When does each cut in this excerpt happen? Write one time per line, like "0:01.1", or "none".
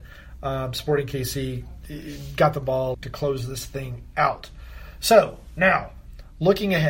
0:02.9